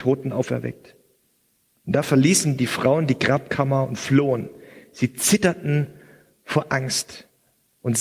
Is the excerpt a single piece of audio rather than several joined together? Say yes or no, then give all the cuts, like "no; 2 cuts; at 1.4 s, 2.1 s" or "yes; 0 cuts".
yes; 0 cuts